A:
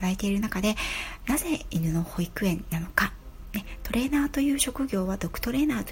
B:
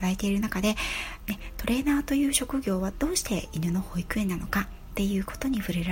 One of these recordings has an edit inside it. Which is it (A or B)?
B